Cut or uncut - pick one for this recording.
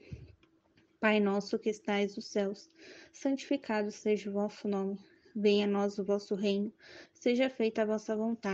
uncut